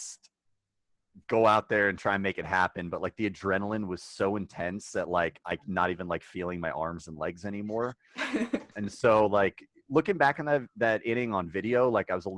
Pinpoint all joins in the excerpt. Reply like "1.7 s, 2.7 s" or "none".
none

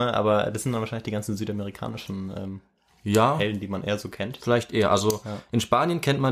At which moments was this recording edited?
none

